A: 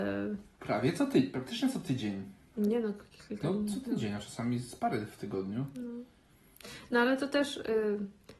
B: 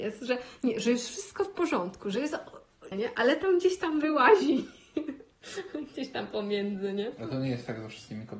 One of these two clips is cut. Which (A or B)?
B